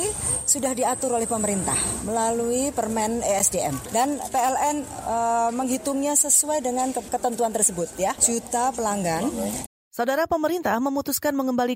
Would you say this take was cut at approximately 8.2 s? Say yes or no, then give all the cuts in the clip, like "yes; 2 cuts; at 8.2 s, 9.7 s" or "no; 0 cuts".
yes; 2 cuts; at 8.2 s, 9.7 s